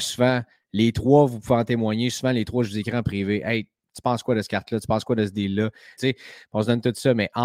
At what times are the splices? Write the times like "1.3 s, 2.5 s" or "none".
6.0 s